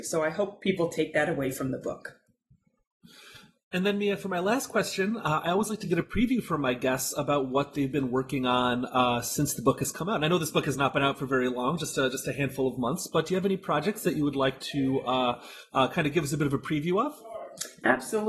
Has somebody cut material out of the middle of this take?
no; 0 cuts

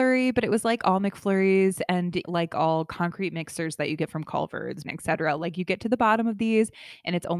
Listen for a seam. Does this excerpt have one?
yes; 2 cuts; at 2.2 s, 4.8 s

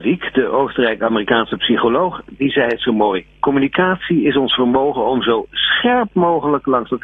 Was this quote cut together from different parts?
no; 0 cuts

